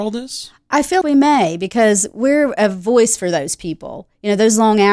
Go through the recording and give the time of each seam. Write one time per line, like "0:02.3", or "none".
0:01.0